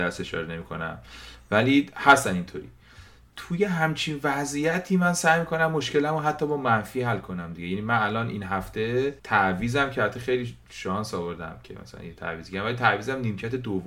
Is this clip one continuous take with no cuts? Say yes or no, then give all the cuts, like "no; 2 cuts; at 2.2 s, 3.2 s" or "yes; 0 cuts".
no; 1 cut; at 9.2 s